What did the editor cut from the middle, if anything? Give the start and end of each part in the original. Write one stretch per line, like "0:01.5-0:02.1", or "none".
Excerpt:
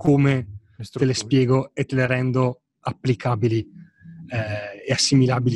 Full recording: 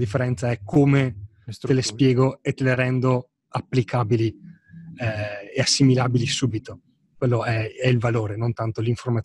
none